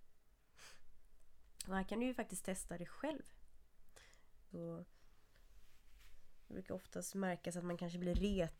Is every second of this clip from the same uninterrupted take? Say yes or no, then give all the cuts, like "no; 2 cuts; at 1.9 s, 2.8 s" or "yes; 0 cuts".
no; 1 cut; at 4.5 s